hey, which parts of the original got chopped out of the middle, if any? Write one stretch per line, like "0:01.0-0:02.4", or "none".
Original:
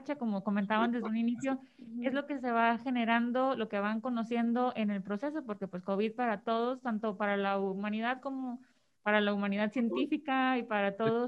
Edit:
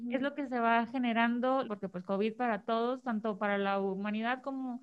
0:03.6-0:05.4